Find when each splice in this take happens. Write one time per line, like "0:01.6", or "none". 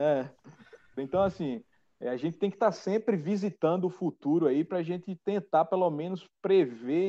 0:01.0